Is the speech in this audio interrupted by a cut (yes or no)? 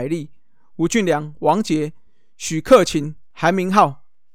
no